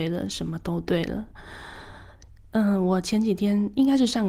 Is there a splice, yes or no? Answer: no